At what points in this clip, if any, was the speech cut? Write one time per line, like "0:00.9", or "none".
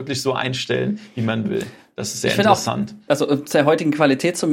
0:03.1